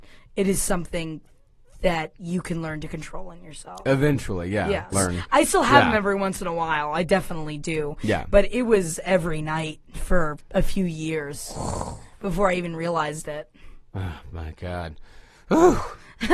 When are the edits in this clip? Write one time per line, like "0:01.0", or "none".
0:04.9